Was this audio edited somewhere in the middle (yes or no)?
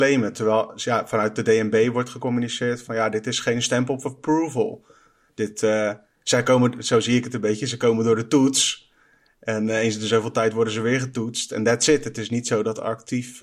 no